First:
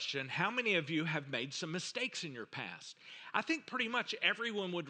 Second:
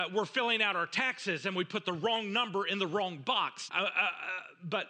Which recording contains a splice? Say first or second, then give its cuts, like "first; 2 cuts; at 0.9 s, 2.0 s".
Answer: second; 1 cut; at 3.7 s